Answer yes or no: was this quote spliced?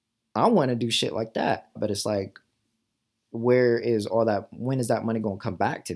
yes